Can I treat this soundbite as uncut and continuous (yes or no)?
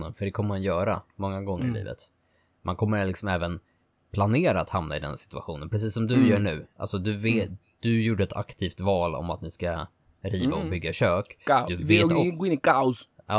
yes